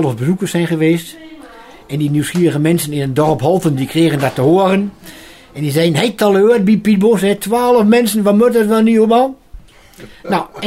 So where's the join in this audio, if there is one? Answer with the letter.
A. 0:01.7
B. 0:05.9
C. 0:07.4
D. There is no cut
D